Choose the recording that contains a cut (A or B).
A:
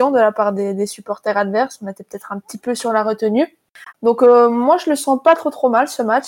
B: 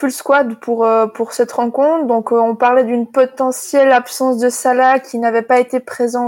A